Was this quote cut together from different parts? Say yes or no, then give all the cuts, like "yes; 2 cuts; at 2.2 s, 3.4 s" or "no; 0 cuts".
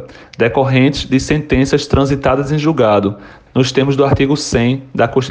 yes; 1 cut; at 3.5 s